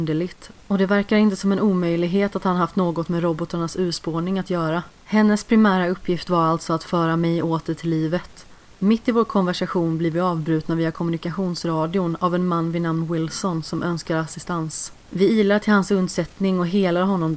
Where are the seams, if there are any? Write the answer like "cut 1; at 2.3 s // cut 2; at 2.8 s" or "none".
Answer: cut 1; at 5.0 s // cut 2; at 15.0 s